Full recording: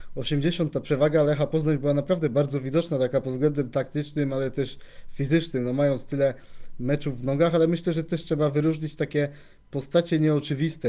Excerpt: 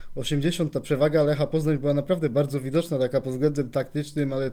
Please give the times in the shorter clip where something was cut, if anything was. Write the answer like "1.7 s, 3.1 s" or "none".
none